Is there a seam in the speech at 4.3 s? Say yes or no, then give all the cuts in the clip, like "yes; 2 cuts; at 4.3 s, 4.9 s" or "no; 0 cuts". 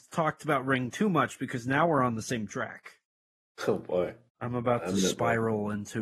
yes; 1 cut; at 4.3 s